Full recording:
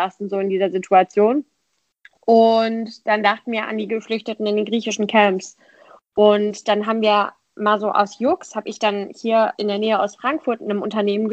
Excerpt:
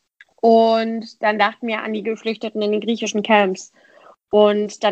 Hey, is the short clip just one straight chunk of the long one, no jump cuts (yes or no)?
yes